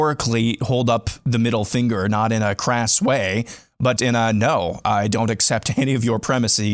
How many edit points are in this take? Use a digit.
1